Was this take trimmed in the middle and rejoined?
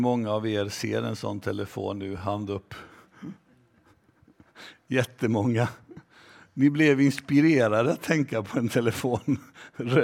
no; 0 cuts

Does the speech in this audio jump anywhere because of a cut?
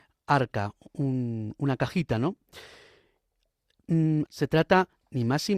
yes; 1 cut; at 4.2 s

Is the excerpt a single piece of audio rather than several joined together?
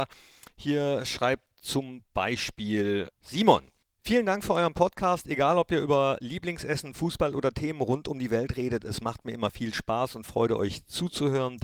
yes; 0 cuts

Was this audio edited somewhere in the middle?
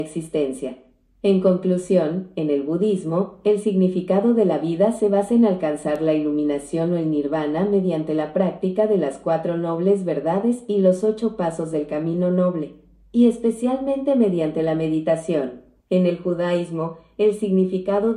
yes; 1 cut; at 15.8 s

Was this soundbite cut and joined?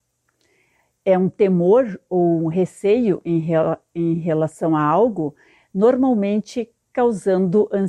no; 0 cuts

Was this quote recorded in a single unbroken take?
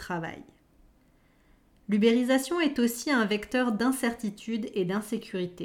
yes; 0 cuts

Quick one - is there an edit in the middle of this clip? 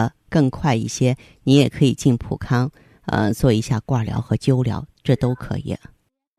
no; 0 cuts

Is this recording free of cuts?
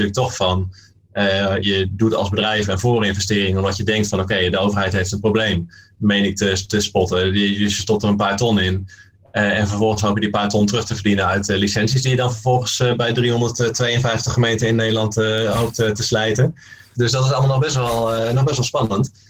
no; 2 cuts; at 1.6 s, 16.9 s

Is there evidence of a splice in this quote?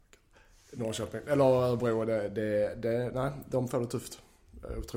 no; 0 cuts

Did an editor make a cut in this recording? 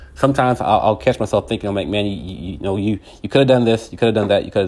no; 0 cuts

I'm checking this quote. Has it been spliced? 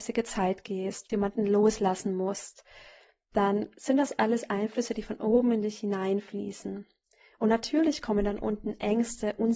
yes; 1 cut; at 1.1 s

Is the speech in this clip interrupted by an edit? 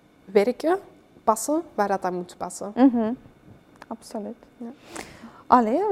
no; 0 cuts

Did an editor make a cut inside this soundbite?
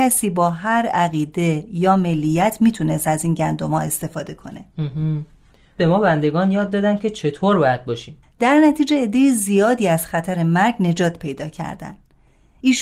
yes; 1 cut; at 8.2 s

